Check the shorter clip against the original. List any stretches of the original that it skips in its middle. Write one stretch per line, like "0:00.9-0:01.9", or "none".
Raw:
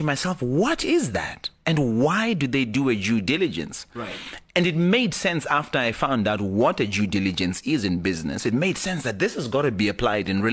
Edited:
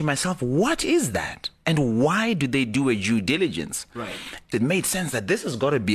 0:04.5-0:08.4